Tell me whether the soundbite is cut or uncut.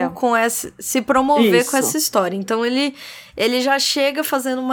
uncut